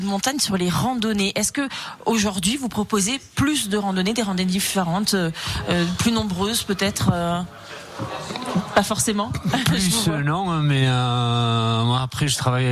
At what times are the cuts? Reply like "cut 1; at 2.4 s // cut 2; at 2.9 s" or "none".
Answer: none